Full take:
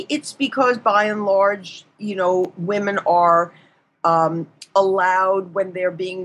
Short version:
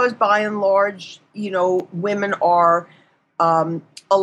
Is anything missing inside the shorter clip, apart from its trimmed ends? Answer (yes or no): no